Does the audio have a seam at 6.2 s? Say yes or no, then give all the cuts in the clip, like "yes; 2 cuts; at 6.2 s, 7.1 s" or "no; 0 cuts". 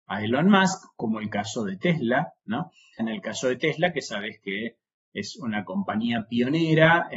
no; 1 cut; at 3.0 s